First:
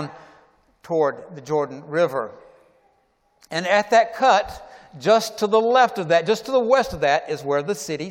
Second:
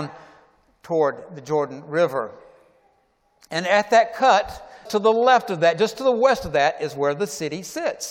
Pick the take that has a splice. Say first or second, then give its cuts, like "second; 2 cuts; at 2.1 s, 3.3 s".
second; 1 cut; at 4.9 s